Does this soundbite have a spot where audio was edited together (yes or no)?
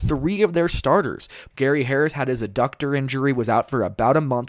yes